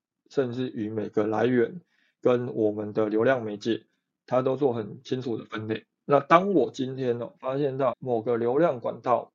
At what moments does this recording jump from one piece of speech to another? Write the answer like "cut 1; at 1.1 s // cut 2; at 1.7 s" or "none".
cut 1; at 7.9 s